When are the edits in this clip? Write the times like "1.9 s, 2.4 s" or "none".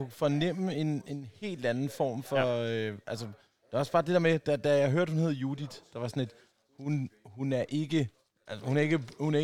none